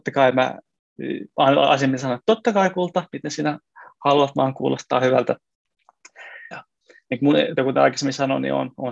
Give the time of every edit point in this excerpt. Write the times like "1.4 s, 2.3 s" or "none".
6.5 s, 7.6 s